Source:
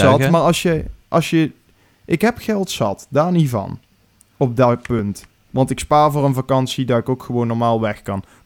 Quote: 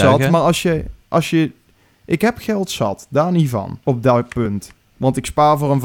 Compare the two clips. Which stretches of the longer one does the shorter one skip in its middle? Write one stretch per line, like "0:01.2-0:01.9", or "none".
0:03.8-0:04.4